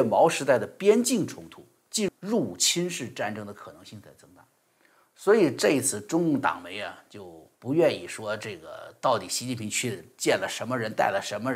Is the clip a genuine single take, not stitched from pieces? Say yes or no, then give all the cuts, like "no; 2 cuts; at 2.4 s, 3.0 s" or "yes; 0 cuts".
no; 2 cuts; at 2.1 s, 7.5 s